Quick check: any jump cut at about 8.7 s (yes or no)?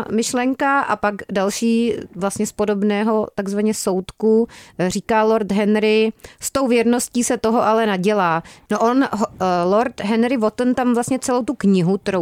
yes